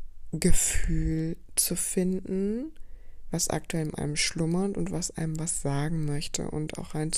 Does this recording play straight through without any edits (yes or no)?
yes